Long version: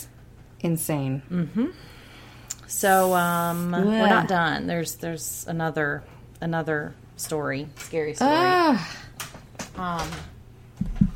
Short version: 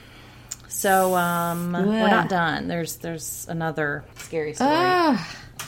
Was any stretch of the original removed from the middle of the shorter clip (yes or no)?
yes